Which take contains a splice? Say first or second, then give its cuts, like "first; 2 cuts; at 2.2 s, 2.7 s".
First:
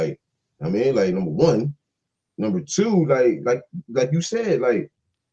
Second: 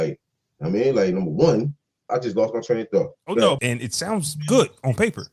second; 2 cuts; at 2.1 s, 3.6 s